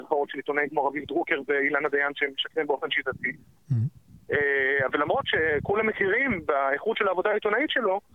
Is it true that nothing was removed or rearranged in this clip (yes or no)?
yes